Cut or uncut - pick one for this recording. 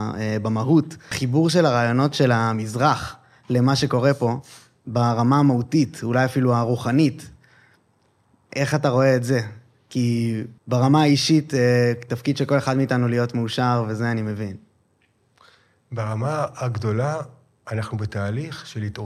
cut